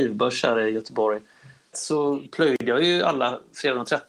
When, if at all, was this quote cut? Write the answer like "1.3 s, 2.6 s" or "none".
1.7 s